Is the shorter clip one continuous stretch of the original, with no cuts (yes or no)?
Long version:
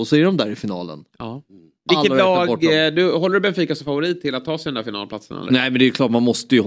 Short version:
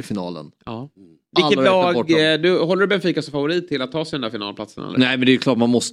yes